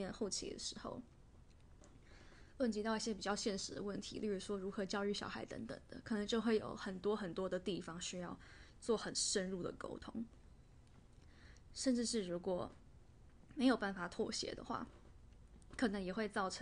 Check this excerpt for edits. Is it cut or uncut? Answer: uncut